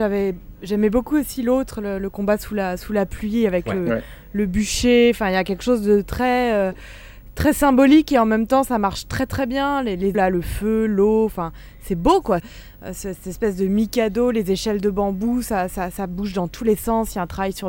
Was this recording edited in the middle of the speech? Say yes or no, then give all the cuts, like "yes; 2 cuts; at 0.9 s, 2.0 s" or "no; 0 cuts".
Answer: yes; 2 cuts; at 10.1 s, 12.4 s